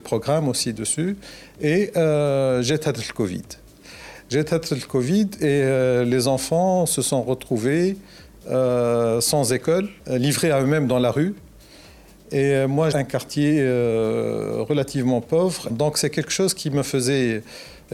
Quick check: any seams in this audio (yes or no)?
yes